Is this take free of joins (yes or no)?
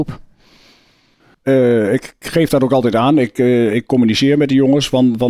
no